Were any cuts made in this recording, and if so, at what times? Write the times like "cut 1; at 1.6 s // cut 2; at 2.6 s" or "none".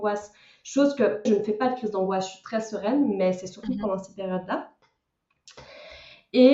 cut 1; at 1.3 s